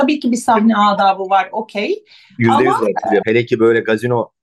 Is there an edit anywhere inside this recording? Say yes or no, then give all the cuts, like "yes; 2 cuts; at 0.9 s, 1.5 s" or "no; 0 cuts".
yes; 1 cut; at 3.2 s